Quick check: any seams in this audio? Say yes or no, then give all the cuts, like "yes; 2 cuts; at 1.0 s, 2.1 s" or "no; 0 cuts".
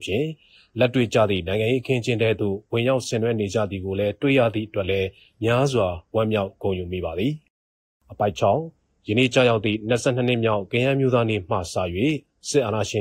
no; 0 cuts